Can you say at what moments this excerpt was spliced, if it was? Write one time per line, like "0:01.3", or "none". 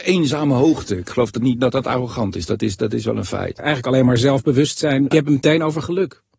0:03.6
0:05.1